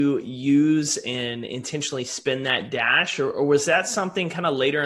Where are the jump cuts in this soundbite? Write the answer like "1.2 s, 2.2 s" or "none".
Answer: none